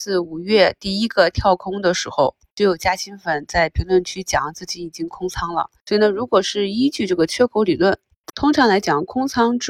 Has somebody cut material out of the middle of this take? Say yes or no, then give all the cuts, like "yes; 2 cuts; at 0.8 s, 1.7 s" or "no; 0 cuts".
yes; 1 cut; at 8.3 s